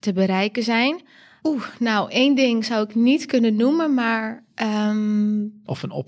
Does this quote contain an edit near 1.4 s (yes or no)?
yes